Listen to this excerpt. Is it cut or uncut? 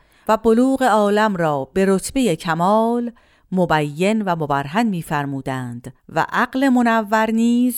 cut